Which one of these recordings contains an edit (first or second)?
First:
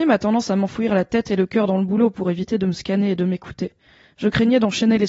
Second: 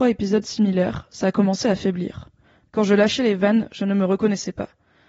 second